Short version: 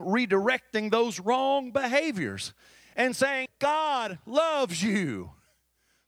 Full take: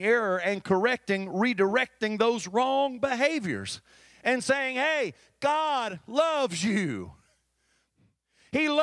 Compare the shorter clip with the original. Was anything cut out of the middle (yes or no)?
yes